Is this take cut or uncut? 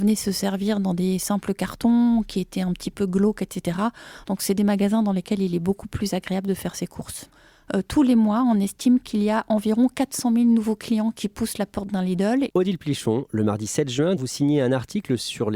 cut